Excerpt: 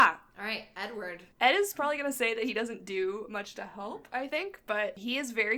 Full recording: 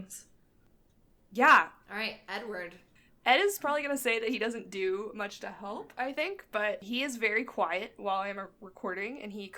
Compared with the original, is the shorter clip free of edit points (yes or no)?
no